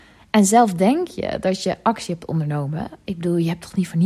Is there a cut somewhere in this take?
no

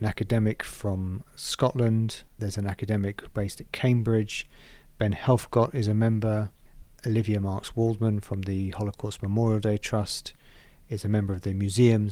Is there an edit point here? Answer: no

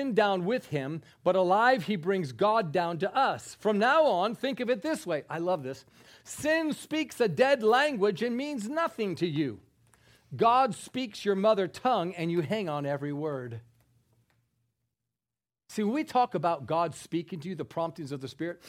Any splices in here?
no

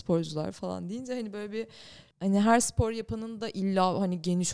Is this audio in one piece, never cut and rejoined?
no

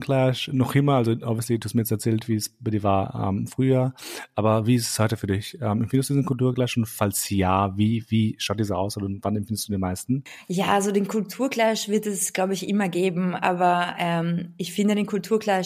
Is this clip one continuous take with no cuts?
yes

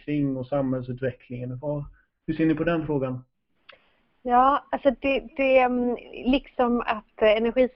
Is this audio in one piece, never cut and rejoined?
yes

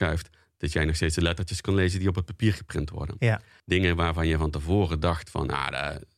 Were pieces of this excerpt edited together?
yes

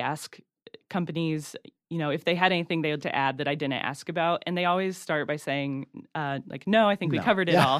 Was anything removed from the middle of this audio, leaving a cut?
yes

